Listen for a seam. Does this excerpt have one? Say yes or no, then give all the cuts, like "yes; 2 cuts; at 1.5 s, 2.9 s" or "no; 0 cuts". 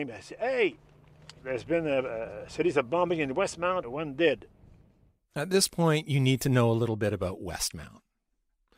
yes; 1 cut; at 3.8 s